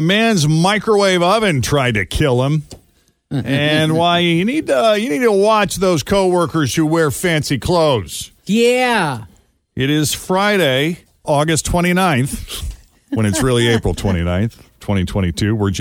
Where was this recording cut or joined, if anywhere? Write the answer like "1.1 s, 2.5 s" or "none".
8.4 s, 11.2 s